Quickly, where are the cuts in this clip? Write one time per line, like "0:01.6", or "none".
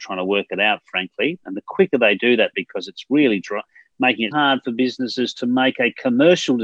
0:02.5
0:04.3